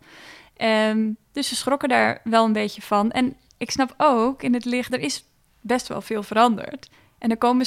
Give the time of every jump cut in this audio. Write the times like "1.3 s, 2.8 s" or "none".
4.9 s